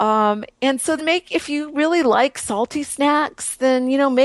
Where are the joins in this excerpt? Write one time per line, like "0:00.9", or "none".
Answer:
0:01.0